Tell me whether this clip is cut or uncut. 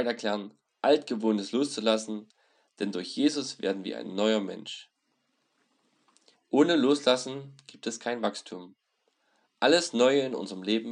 cut